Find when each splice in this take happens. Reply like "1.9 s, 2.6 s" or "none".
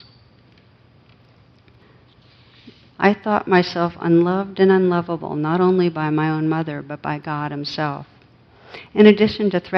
2.9 s